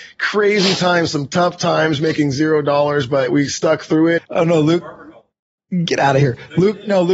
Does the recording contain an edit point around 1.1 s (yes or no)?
no